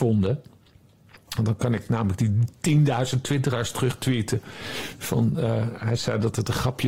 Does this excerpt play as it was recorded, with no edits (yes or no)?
no